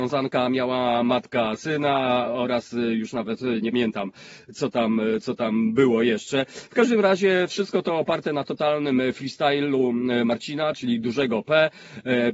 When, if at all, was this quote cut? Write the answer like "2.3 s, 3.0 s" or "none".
3.7 s